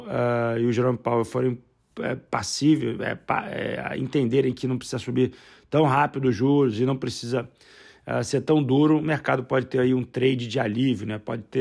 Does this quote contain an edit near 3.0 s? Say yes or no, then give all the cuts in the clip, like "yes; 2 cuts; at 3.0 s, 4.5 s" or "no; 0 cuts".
no; 0 cuts